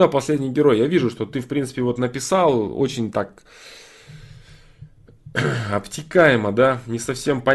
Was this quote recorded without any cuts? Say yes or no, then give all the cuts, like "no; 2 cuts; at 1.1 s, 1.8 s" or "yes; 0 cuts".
yes; 0 cuts